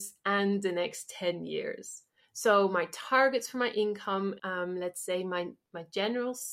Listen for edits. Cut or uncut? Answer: cut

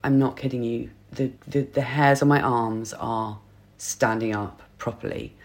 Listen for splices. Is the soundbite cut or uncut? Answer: cut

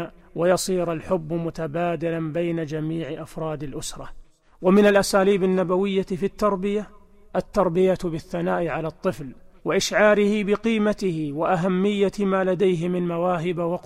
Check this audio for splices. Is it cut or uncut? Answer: uncut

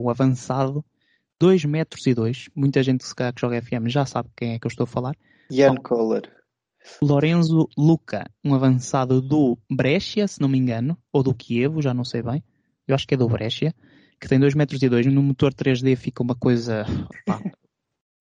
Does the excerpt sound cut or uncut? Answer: uncut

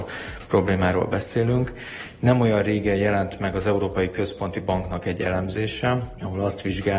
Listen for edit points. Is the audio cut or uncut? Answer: uncut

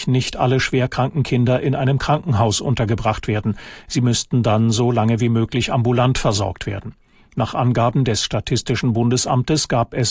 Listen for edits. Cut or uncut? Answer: uncut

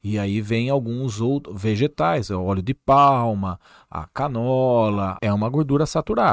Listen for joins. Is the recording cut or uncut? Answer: cut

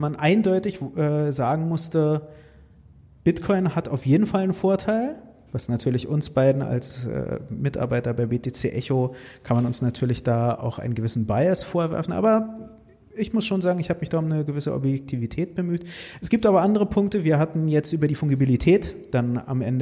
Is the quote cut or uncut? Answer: uncut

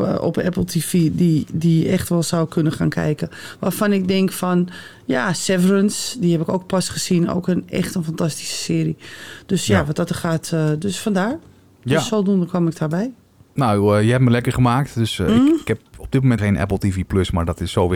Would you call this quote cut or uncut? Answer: cut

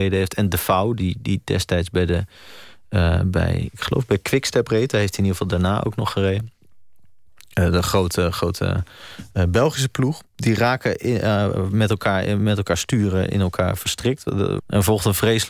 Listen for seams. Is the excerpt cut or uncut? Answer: cut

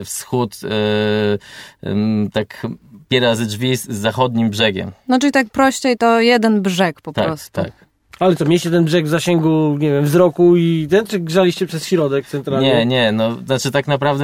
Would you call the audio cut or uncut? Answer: uncut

